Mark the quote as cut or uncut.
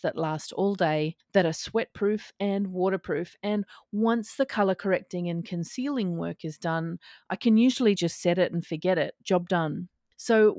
uncut